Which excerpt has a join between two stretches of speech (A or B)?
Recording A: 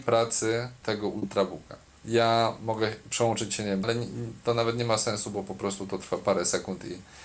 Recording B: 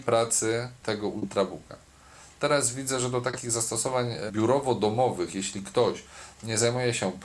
A